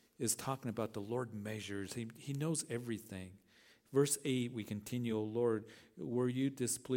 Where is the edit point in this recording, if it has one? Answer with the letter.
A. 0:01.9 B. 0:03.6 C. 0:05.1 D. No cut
D